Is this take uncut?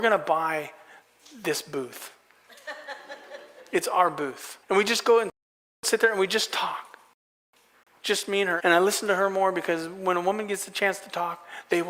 no; 2 cuts; at 4.6 s, 8.6 s

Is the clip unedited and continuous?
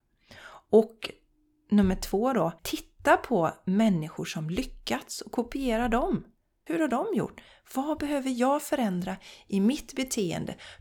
no; 2 cuts; at 2.6 s, 6.7 s

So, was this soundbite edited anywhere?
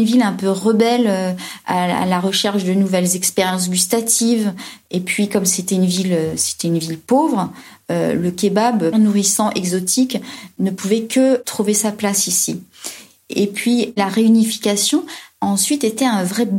yes; 1 cut; at 8.9 s

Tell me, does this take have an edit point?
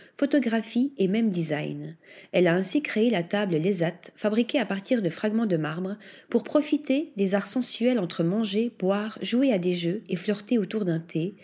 no; 0 cuts

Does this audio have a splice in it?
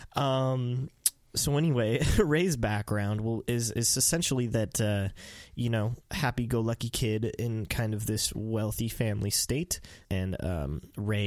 yes; 1 cut; at 10.0 s

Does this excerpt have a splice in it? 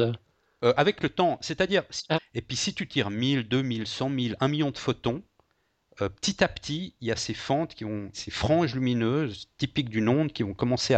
yes; 2 cuts; at 2.1 s, 8.1 s

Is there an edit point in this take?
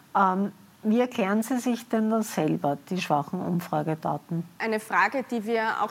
yes; 1 cut; at 4.5 s

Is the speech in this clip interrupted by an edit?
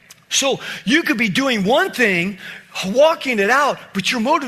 no; 0 cuts

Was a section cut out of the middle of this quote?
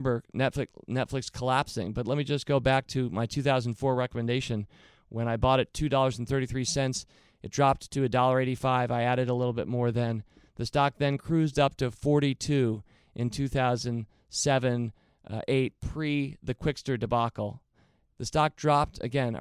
no; 0 cuts

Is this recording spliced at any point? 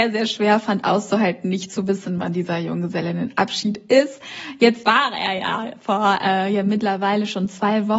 no; 0 cuts

